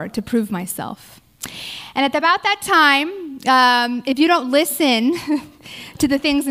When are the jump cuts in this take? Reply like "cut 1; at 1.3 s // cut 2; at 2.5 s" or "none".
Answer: none